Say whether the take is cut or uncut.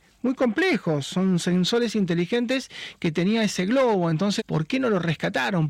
cut